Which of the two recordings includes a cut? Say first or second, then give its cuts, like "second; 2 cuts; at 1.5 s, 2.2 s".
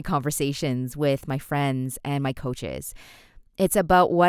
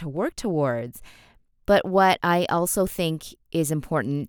second; 1 cut; at 1.5 s